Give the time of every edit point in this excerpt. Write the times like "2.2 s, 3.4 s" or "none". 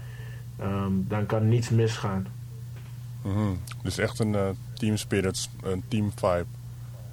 none